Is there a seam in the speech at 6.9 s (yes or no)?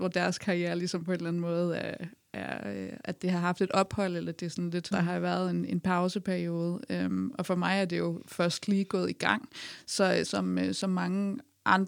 no